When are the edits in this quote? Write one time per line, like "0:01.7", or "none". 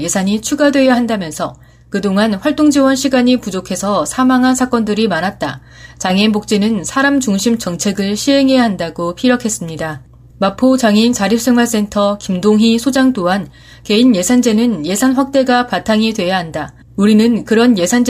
0:16.8